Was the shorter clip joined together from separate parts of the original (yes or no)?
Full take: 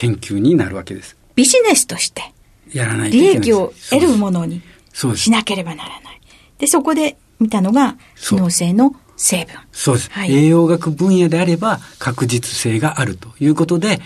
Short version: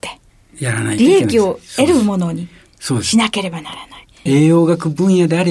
yes